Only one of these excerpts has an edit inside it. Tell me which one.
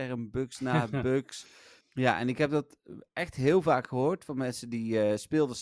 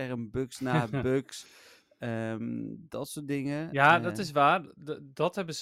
first; 1 cut; at 1.8 s

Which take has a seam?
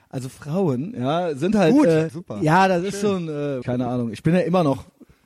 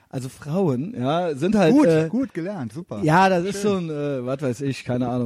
first; 2 cuts; at 2.1 s, 3.6 s

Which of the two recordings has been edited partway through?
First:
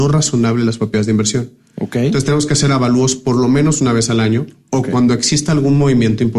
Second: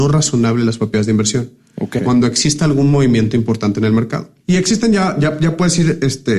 second; 2 cuts; at 2.0 s, 4.4 s

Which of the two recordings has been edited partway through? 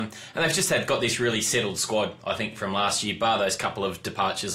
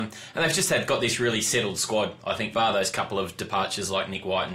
second; 1 cut; at 2.5 s

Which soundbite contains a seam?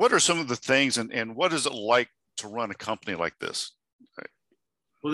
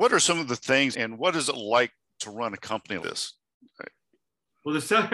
second; 2 cuts; at 0.9 s, 3.0 s

